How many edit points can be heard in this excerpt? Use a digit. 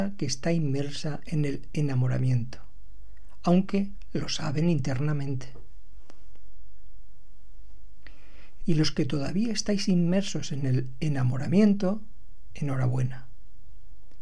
1